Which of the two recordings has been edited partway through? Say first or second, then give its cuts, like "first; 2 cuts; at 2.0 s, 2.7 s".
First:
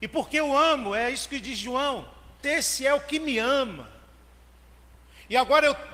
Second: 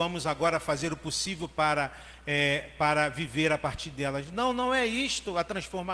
first; 1 cut; at 2.4 s